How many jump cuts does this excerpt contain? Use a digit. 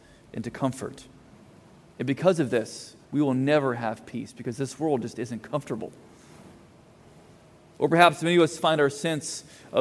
1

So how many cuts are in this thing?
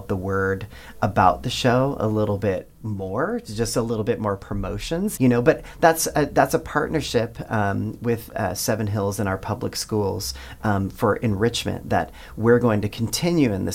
1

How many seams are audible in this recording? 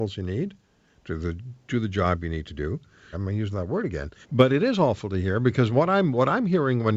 2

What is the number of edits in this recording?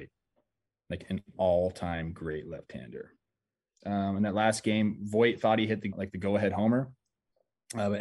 2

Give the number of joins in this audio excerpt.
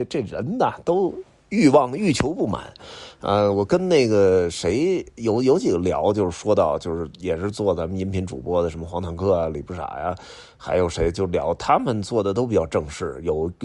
0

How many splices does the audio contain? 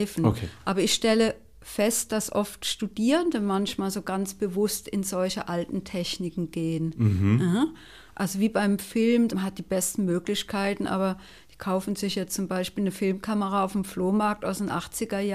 1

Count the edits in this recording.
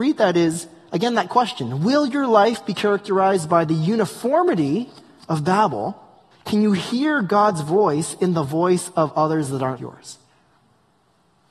2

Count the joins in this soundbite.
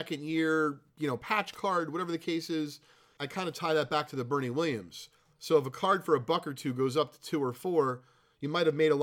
1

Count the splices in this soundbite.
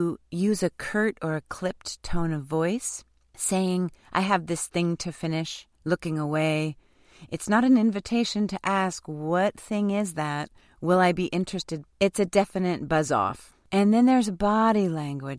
1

